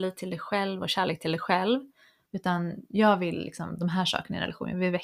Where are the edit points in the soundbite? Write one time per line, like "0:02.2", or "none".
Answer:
0:02.3

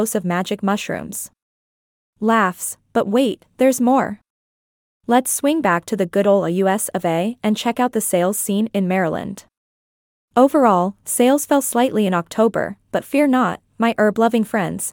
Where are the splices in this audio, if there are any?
none

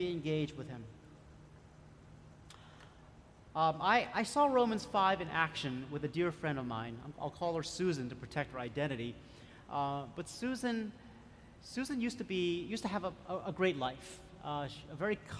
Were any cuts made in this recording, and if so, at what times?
none

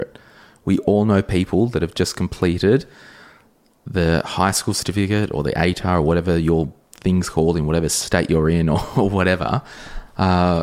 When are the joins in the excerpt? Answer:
none

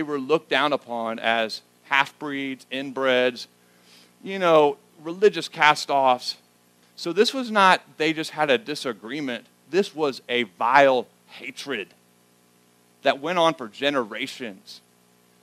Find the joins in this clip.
0:06.8

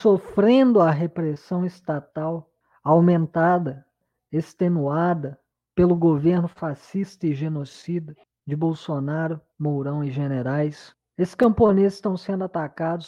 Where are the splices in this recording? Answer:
0:09.5

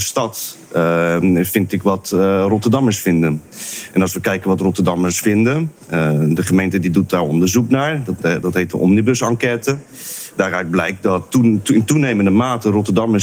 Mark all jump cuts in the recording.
none

